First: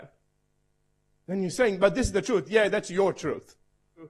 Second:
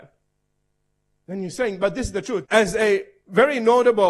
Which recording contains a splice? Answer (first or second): second